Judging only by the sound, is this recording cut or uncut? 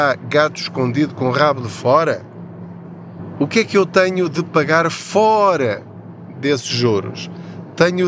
uncut